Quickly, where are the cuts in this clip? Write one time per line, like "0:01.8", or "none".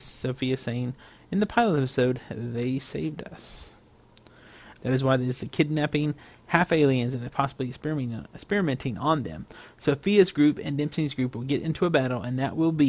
0:04.8

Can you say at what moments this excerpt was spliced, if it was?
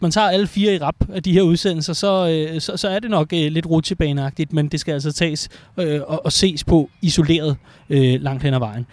none

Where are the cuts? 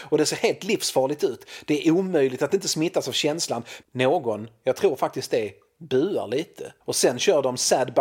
0:03.8
0:06.8

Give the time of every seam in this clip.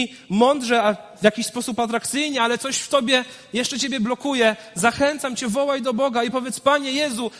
none

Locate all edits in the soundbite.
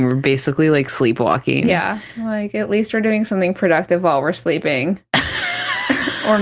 none

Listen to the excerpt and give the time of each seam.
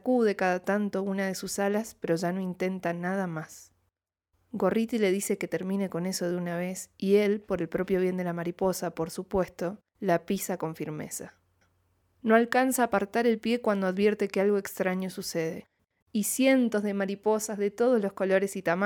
0:16.0

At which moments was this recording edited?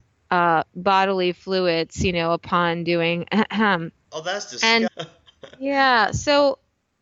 0:04.9

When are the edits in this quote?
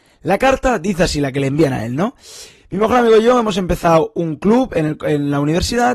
none

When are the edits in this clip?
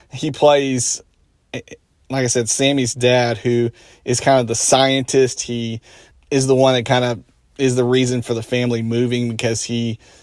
0:06.1

